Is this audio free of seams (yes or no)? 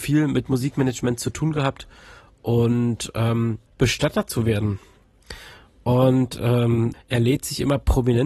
no